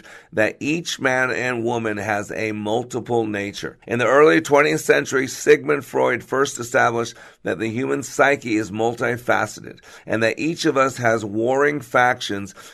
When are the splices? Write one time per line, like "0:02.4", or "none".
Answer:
0:03.8